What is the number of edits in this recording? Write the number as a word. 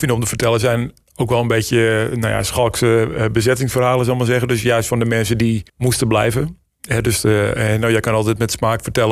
one